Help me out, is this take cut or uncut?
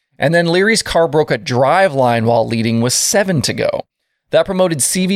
uncut